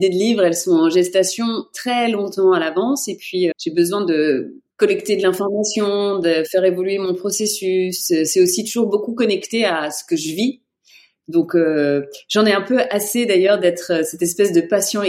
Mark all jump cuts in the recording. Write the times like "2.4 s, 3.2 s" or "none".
3.5 s, 4.7 s